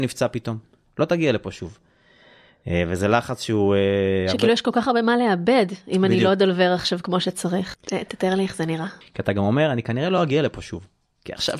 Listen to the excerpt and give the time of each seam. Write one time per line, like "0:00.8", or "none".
0:07.7
0:09.0